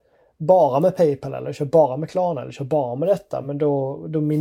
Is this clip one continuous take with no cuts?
yes; 0 cuts

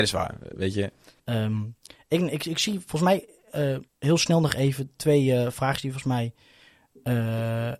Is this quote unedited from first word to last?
no; 2 cuts; at 1.2 s, 3.9 s

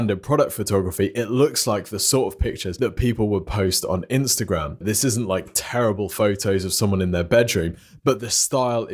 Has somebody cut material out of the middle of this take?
yes; 1 cut; at 4.8 s

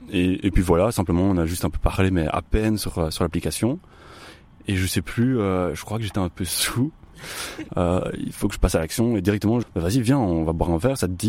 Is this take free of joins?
no; 2 cuts; at 7.7 s, 9.6 s

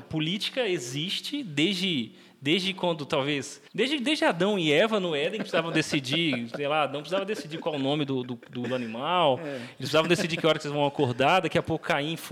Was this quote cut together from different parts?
yes; 1 cut; at 3.7 s

